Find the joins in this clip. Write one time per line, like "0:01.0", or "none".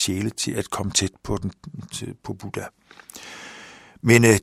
none